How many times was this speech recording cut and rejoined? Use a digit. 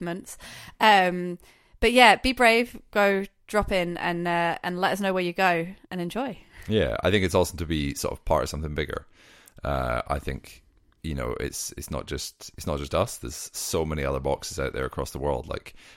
1